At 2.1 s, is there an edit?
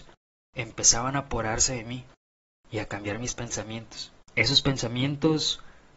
no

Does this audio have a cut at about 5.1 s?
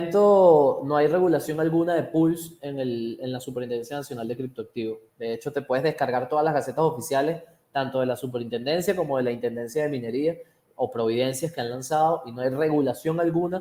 no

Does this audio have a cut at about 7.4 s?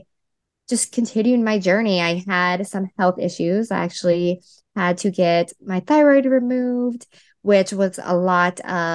no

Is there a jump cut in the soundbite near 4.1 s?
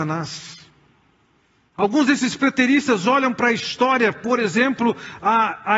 no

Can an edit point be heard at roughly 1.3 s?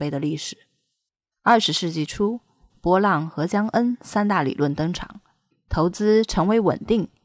yes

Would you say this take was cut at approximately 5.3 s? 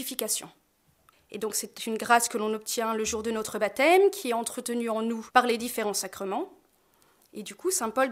yes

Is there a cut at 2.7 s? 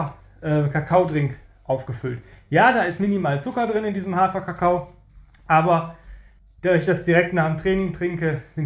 no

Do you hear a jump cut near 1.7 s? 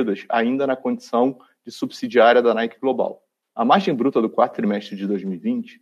no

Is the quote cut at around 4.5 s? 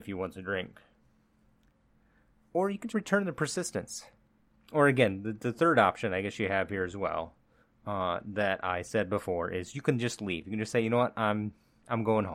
yes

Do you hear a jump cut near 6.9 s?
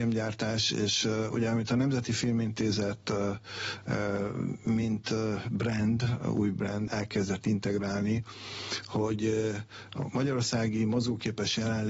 yes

